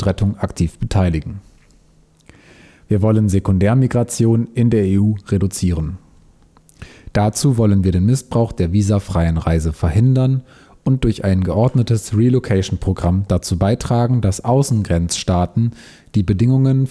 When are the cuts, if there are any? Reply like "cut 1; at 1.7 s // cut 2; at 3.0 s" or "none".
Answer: none